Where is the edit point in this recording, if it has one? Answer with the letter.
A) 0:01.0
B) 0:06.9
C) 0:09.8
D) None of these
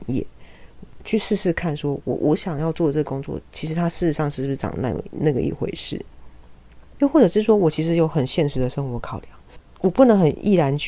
D